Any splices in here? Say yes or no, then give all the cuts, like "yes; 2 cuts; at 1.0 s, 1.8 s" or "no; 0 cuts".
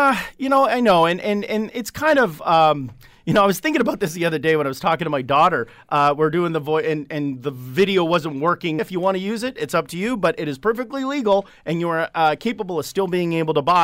yes; 1 cut; at 8.8 s